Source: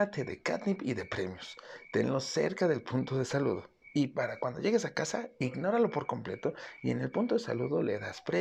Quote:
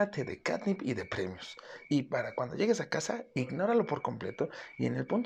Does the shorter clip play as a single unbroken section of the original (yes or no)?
no